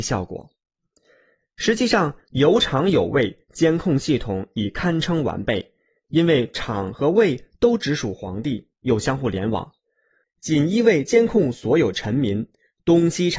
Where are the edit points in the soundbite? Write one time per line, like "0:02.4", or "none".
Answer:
0:10.2